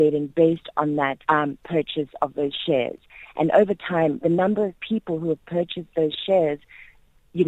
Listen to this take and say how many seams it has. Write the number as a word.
one